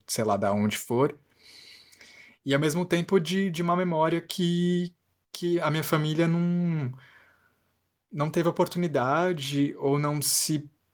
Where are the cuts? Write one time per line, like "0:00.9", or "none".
none